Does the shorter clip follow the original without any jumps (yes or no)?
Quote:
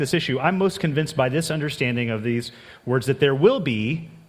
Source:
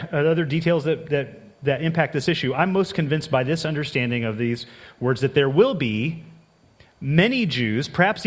yes